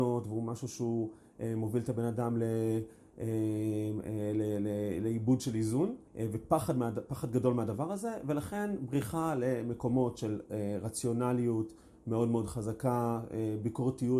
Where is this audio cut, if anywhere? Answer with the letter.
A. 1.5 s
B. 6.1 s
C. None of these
B